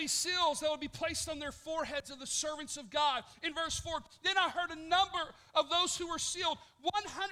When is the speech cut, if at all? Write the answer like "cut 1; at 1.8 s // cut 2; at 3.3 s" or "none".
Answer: none